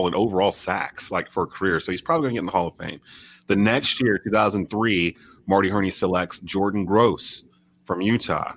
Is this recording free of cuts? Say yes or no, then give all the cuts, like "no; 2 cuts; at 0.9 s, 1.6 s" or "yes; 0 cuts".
yes; 0 cuts